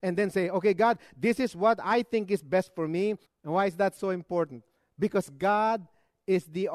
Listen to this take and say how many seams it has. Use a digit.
1